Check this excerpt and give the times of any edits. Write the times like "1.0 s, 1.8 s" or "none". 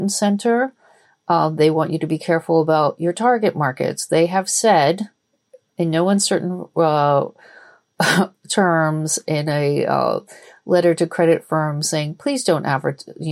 none